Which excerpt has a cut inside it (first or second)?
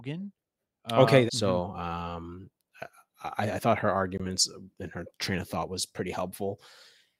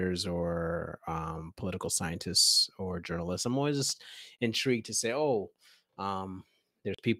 first